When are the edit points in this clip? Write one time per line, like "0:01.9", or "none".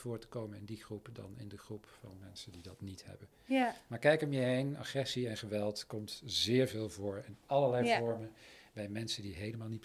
none